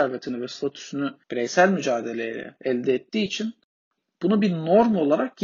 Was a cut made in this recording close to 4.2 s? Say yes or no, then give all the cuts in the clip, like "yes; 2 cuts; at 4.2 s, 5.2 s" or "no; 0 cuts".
no; 1 cut; at 1.2 s